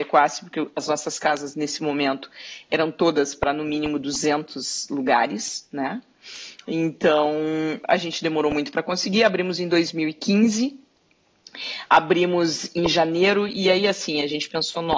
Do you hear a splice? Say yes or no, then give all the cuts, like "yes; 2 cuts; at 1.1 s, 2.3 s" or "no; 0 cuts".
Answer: no; 0 cuts